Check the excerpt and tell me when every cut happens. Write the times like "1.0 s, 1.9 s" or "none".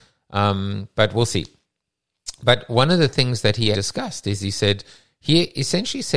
3.7 s